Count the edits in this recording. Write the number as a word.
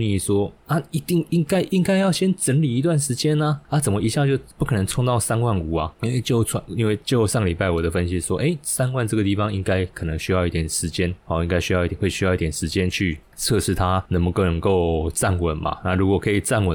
one